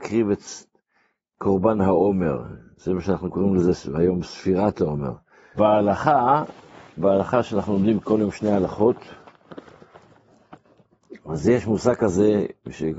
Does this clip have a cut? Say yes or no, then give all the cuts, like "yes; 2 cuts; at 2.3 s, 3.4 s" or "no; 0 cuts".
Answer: yes; 1 cut; at 5.5 s